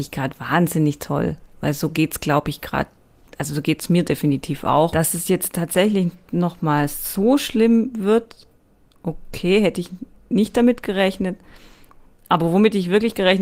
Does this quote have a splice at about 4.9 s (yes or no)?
yes